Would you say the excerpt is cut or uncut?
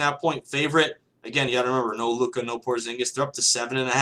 uncut